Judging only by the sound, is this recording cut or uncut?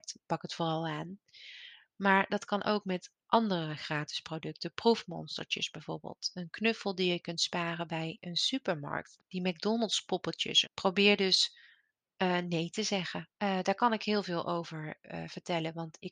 cut